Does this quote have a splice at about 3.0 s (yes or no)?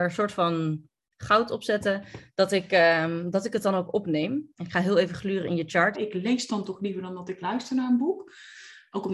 no